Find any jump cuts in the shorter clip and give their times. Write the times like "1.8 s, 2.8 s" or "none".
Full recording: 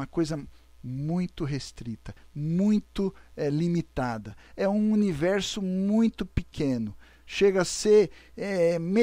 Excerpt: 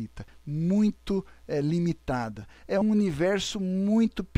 2.8 s